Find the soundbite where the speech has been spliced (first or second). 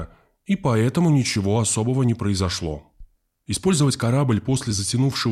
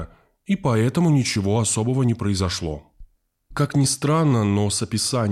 first